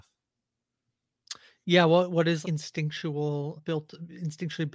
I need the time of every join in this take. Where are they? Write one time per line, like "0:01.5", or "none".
0:02.4
0:03.6